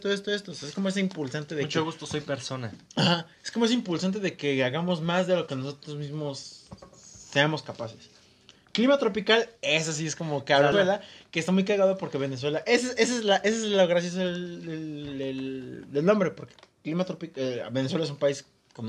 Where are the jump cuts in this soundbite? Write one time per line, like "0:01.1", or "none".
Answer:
0:10.7